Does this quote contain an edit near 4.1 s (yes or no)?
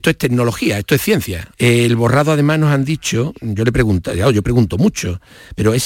no